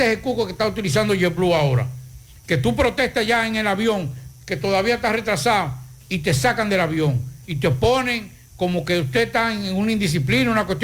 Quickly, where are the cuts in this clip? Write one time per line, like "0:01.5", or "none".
none